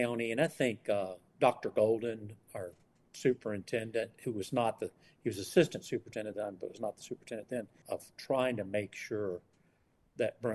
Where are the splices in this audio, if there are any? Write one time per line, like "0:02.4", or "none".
0:07.8